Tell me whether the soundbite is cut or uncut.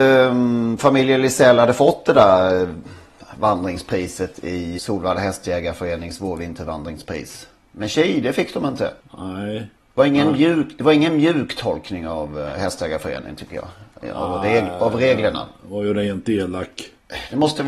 cut